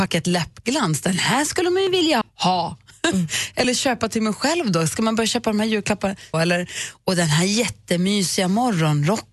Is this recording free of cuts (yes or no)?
no